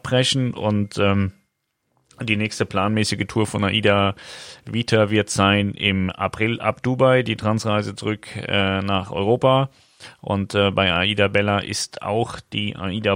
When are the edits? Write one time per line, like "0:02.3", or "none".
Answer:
none